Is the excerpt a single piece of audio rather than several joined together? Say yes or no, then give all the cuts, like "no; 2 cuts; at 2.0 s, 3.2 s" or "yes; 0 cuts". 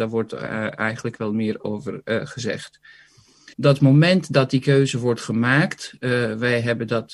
no; 1 cut; at 3.5 s